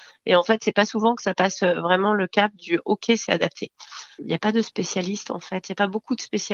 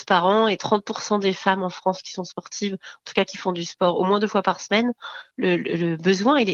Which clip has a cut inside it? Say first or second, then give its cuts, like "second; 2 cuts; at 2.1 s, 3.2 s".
first; 1 cut; at 4.2 s